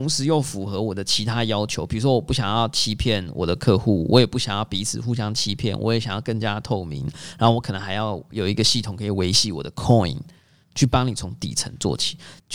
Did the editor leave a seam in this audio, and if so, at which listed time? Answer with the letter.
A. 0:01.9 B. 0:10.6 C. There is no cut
B